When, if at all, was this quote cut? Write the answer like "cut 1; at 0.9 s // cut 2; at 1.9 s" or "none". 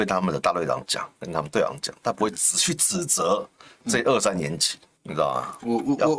cut 1; at 5.0 s

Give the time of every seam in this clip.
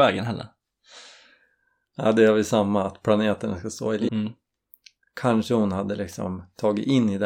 cut 1; at 4.1 s

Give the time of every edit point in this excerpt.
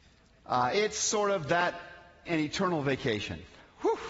cut 1; at 2.3 s

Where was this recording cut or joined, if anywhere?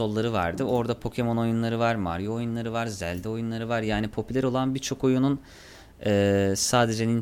none

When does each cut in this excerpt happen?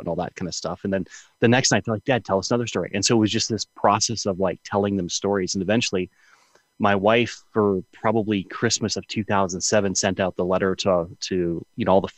none

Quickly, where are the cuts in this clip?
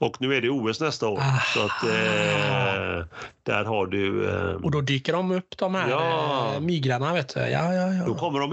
none

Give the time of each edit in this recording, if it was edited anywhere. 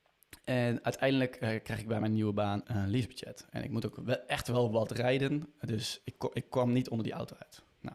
cut 1; at 2.6 s

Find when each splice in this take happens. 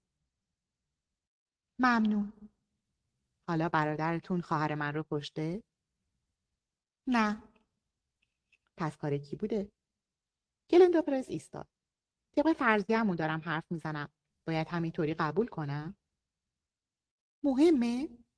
cut 1; at 12.2 s // cut 2; at 14.3 s

